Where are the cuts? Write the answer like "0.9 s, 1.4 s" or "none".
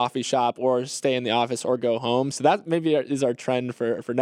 2.3 s